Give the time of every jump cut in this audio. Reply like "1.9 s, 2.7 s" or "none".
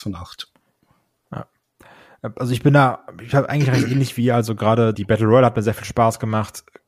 4.9 s